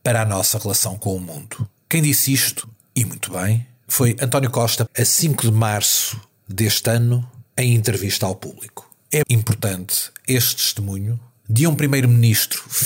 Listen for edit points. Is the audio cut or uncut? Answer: cut